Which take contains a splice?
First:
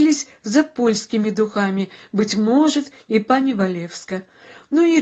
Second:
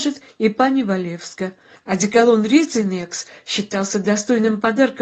second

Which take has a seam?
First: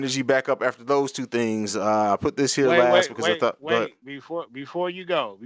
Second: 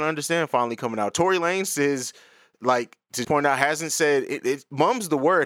second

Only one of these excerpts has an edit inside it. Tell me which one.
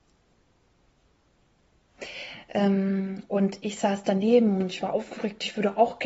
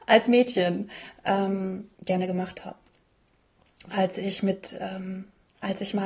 second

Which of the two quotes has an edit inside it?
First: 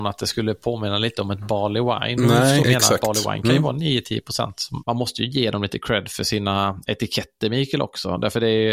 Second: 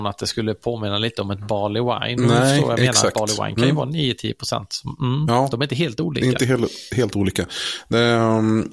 first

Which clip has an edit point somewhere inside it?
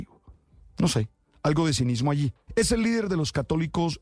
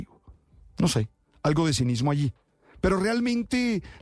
first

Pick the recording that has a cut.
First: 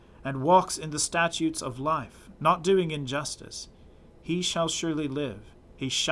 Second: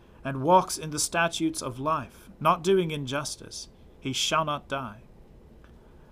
second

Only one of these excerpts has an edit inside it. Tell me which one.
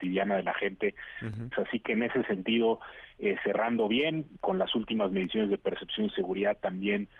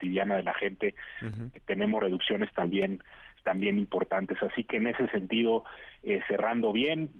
first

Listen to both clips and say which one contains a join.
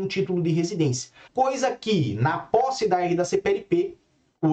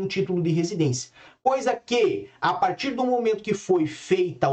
first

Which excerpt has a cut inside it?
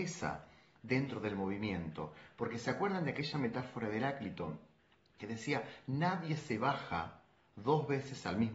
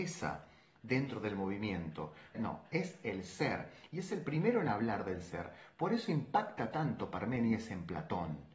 second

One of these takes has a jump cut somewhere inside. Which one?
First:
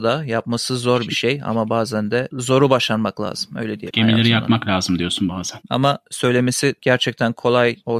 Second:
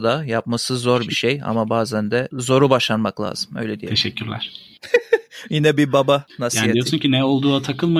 first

